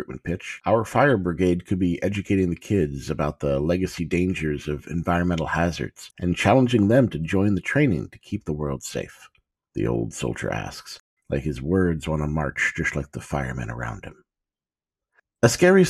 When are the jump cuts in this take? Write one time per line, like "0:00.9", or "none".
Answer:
0:09.6
0:11.2